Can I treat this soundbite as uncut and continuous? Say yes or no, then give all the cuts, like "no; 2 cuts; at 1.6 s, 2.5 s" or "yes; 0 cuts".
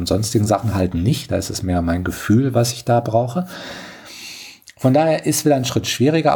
yes; 0 cuts